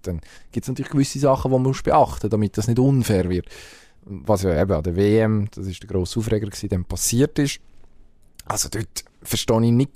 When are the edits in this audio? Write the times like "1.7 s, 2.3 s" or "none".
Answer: none